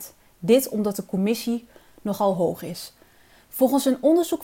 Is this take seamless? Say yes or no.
yes